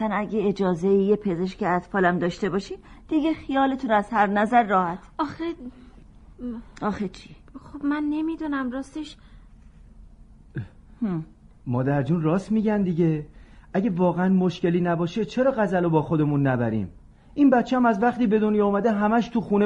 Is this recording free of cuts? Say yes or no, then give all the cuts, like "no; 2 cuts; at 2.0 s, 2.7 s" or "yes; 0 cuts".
yes; 0 cuts